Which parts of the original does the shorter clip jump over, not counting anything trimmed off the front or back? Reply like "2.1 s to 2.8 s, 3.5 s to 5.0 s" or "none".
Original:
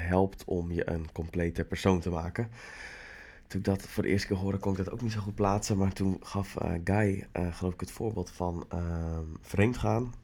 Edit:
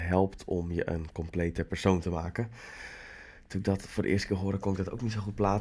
none